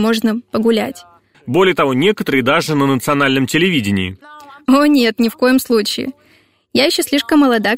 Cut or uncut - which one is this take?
cut